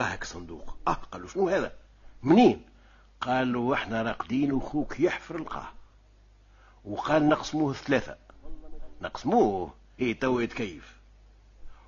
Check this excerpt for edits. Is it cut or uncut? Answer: cut